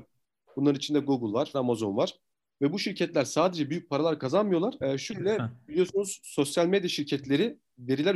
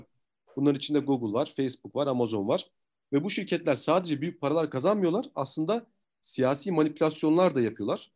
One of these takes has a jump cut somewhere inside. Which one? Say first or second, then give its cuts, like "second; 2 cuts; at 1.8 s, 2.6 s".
first; 2 cuts; at 1.5 s, 4.8 s